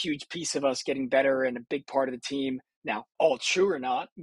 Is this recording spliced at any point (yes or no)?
yes